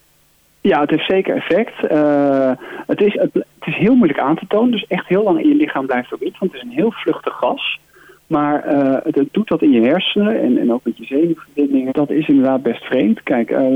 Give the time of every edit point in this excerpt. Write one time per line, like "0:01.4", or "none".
0:03.1
0:11.9